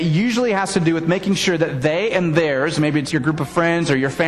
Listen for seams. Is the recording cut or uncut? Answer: cut